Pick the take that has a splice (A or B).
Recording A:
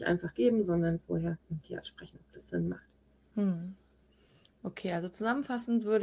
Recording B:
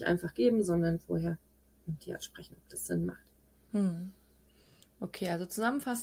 A